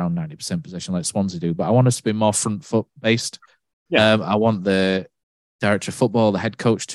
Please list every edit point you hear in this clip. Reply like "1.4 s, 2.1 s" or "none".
none